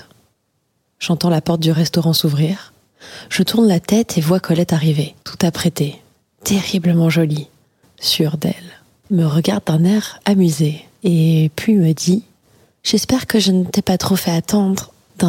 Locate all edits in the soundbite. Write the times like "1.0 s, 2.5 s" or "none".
7.8 s, 9.1 s